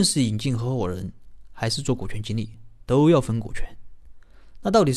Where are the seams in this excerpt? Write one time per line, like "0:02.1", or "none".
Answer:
none